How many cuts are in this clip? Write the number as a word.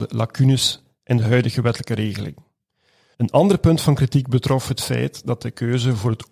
one